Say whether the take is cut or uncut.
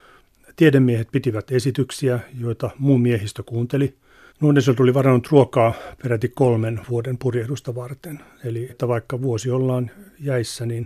cut